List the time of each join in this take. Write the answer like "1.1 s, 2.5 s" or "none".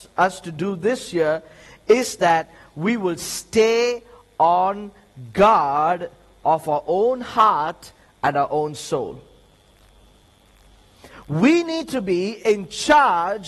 11.1 s